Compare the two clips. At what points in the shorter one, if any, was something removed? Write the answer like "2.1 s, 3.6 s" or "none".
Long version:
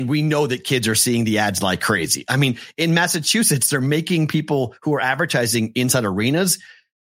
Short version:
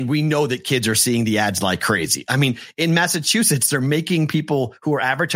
none